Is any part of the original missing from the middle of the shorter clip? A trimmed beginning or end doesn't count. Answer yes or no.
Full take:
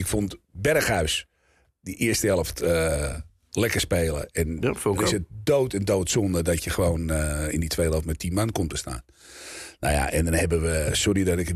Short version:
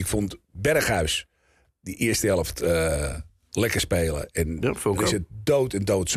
no